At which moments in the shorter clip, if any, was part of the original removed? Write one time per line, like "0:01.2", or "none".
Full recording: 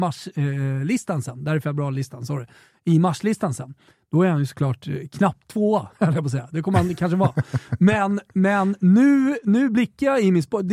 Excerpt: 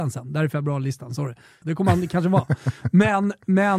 0:01.6

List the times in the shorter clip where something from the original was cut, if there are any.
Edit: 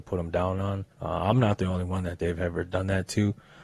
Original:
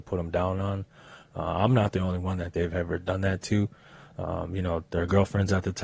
0:00.9

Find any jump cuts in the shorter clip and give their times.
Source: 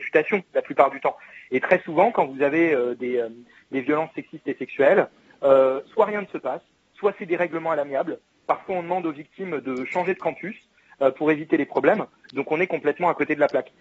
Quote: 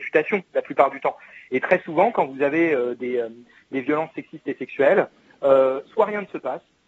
none

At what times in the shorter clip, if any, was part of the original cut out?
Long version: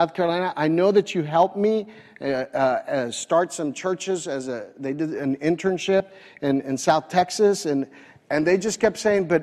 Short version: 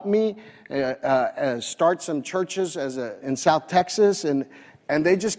0:03.2

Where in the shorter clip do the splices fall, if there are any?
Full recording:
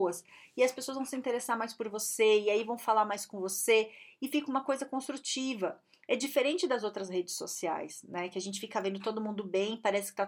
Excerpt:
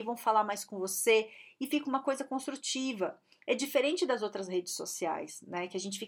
none

